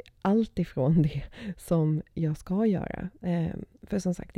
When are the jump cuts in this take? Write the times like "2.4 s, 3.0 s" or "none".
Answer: none